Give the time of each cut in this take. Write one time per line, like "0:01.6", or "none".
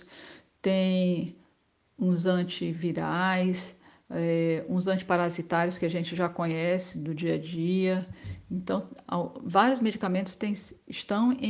none

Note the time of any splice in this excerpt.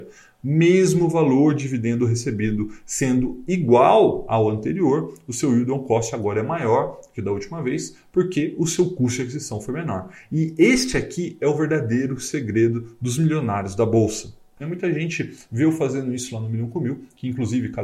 0:14.6

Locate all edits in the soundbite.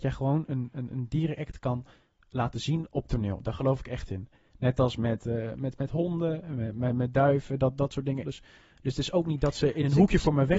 0:08.2

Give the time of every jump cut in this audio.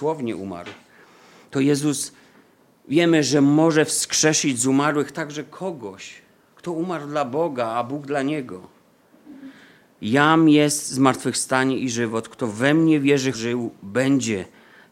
0:10.0
0:13.3

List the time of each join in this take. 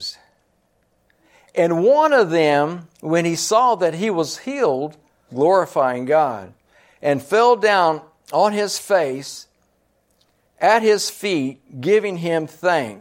0:05.3

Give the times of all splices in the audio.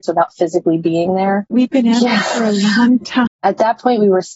0:01.5
0:03.3

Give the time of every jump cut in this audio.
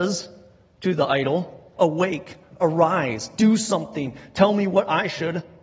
0:01.8

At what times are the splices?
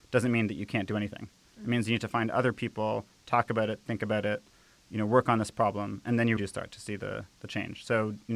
0:06.4

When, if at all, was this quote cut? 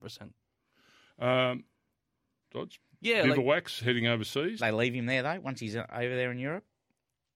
0:02.4
0:04.6

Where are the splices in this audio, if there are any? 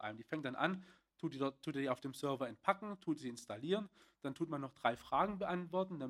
0:01.0

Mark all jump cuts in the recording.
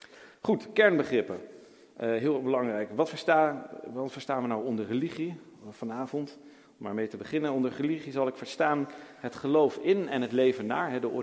none

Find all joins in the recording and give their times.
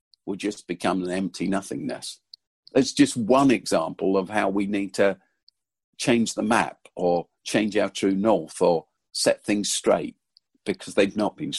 none

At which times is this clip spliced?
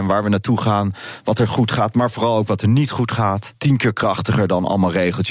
none

